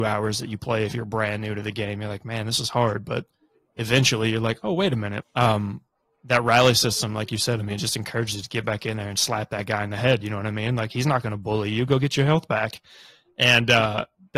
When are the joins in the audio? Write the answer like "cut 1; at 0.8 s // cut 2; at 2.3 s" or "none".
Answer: cut 1; at 5.2 s